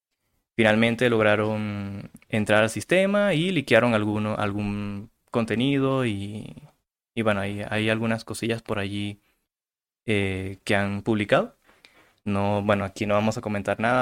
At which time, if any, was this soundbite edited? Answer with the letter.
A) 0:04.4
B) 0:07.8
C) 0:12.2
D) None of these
D